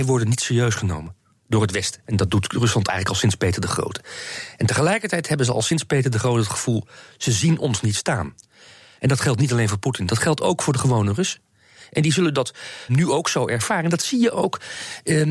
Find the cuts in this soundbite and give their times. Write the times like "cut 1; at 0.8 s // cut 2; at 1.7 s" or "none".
cut 1; at 2.0 s // cut 2; at 12.9 s